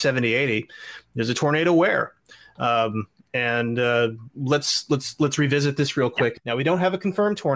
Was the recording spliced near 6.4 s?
yes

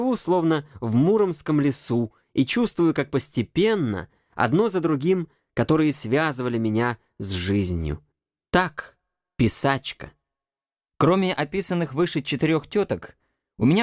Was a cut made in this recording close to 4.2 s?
no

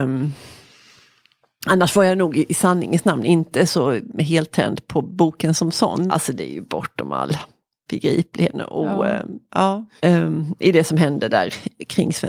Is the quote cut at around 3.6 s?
no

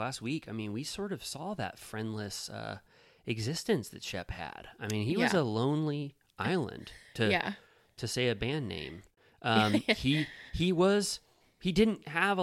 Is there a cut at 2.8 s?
no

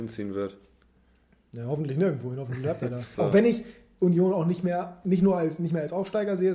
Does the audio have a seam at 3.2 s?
yes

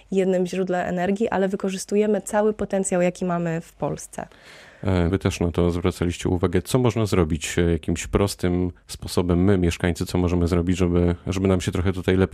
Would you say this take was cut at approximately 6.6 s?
no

